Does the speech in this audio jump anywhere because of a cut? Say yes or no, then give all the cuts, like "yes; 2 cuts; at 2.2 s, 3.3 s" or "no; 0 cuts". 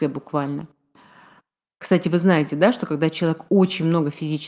no; 0 cuts